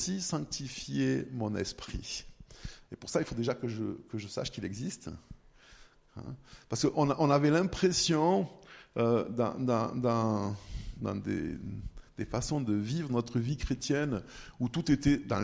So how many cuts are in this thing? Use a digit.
0